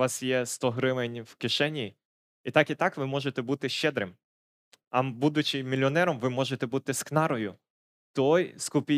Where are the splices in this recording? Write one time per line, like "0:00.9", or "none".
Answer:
none